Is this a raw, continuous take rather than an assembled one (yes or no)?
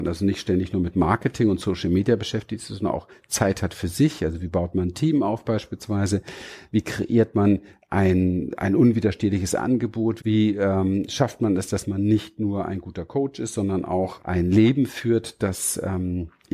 no